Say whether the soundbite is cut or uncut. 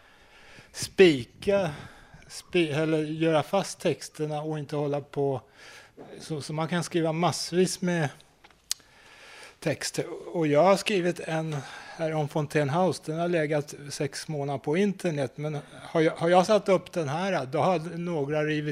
uncut